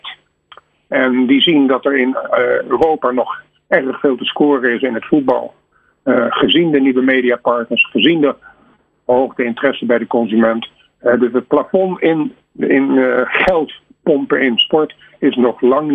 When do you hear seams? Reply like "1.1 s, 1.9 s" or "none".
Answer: none